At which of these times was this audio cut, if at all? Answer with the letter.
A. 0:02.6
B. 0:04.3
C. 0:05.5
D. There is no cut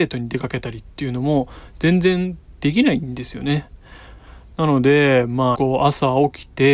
C